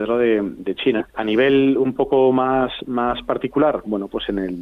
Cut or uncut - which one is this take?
cut